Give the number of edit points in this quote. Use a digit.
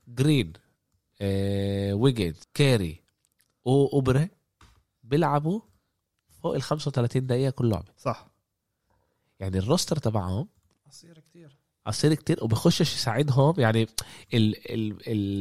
1